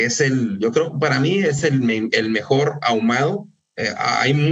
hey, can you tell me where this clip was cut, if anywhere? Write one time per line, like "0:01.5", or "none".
none